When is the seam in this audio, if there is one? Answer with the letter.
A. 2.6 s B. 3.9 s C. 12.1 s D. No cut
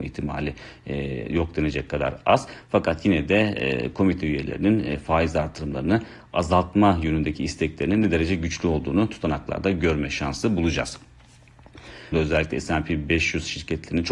C